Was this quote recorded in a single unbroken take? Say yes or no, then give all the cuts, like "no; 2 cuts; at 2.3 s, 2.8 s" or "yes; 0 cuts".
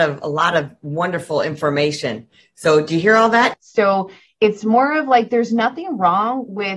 no; 1 cut; at 3.5 s